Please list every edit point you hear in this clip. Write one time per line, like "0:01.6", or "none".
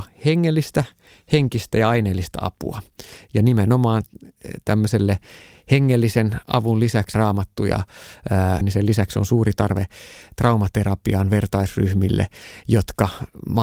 0:07.1
0:08.6